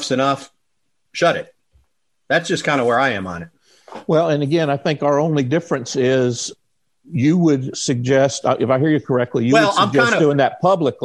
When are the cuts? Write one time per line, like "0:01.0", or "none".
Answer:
none